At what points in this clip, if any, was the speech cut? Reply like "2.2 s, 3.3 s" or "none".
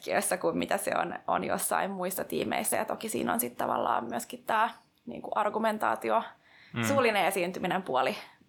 none